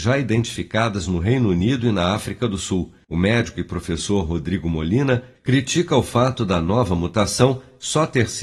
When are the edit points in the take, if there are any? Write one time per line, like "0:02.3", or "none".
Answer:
0:03.0
0:05.4